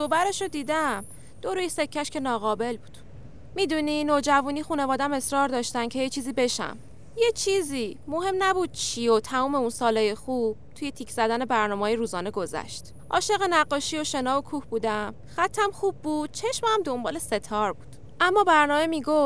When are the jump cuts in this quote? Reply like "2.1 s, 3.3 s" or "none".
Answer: none